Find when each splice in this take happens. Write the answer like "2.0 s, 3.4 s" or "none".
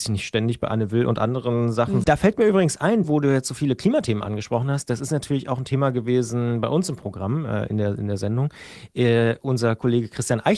2.0 s, 3.0 s